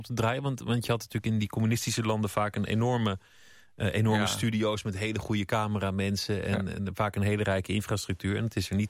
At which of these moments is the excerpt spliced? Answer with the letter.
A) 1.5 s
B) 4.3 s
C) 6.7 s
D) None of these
D